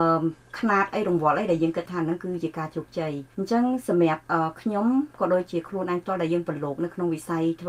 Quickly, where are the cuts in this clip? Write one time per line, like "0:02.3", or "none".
0:03.3